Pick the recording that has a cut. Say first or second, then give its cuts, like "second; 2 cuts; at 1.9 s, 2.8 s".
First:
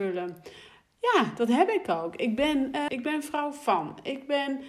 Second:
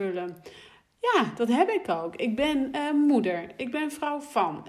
first; 1 cut; at 2.9 s